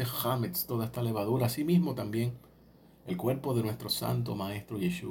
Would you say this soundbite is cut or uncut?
uncut